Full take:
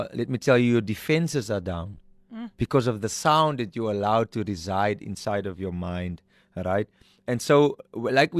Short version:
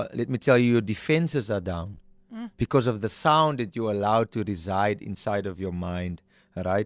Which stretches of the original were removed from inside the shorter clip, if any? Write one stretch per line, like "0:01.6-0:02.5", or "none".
none